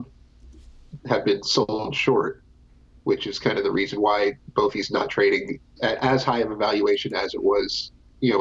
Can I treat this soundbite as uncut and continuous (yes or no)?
no